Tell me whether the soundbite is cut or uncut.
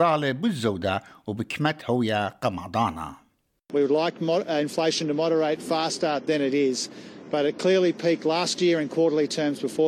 uncut